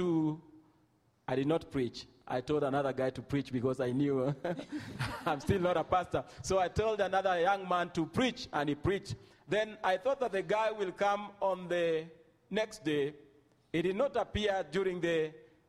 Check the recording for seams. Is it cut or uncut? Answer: uncut